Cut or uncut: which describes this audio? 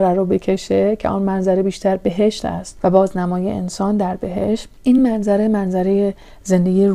uncut